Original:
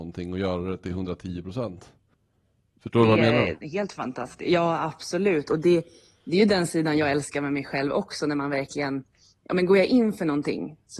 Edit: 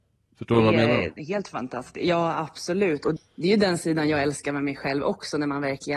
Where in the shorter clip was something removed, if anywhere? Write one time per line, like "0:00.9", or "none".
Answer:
0:03.2